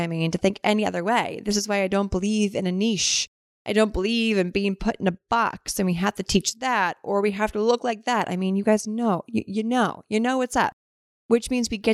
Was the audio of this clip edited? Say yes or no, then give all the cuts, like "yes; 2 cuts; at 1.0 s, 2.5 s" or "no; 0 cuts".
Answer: no; 0 cuts